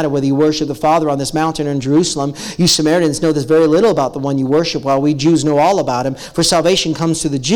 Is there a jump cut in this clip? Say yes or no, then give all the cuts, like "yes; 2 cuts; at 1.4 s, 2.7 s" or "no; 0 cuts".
no; 0 cuts